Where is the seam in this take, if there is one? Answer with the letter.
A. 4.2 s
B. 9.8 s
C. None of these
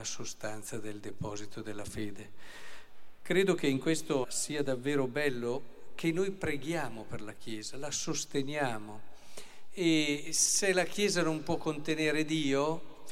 A